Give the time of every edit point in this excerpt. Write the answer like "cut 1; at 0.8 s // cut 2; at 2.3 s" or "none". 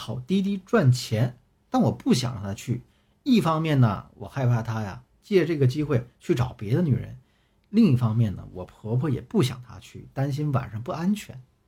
none